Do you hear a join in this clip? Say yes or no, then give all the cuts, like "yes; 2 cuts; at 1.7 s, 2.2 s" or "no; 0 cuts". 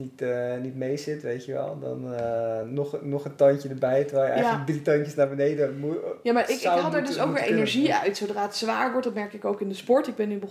no; 0 cuts